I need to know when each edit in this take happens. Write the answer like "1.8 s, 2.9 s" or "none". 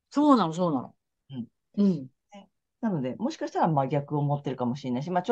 1.2 s